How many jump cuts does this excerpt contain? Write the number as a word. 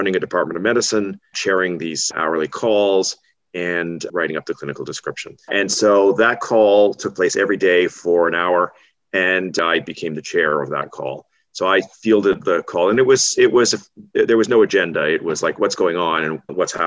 one